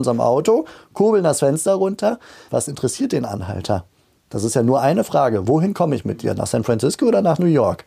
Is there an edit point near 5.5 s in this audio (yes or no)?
yes